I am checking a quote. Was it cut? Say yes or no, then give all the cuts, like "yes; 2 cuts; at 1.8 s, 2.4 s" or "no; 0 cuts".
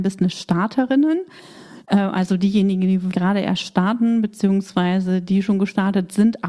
yes; 1 cut; at 3.1 s